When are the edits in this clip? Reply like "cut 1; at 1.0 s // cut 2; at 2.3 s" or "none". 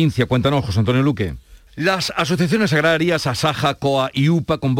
cut 1; at 1.7 s

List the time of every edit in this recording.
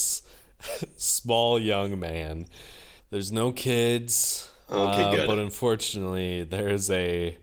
cut 1; at 3.0 s

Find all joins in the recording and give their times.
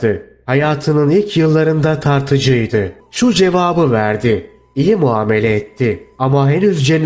cut 1; at 3.0 s

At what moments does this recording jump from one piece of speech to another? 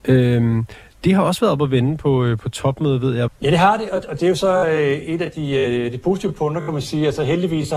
cut 1; at 3.3 s

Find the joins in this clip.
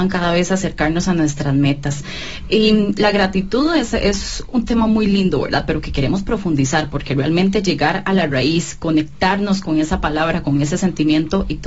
none

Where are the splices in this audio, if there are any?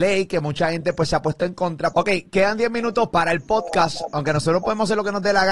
cut 1; at 1.9 s // cut 2; at 3.1 s

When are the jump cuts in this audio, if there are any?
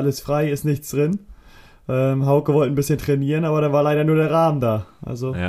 none

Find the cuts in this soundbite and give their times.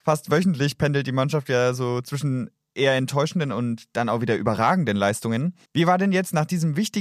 cut 1; at 5.6 s

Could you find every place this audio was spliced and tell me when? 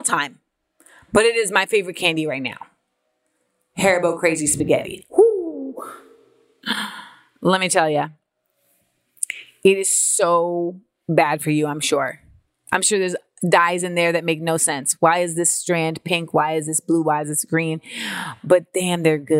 none

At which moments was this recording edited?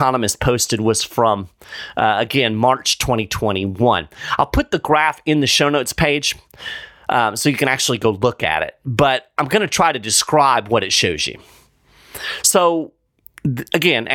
none

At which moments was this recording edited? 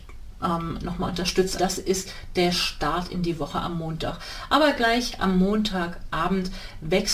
cut 1; at 1.6 s

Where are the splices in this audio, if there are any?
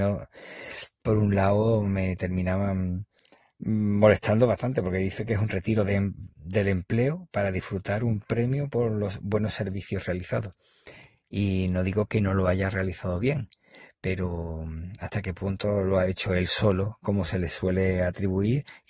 none

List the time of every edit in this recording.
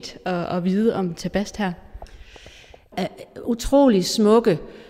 cut 1; at 2.9 s

